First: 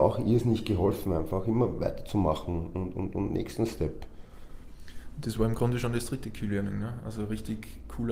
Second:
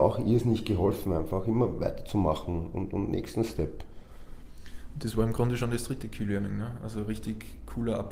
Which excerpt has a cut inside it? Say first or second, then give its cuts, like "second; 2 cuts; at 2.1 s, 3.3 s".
second; 1 cut; at 2.7 s